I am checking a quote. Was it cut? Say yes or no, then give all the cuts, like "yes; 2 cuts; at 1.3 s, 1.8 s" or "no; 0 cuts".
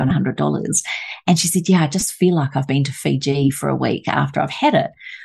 no; 0 cuts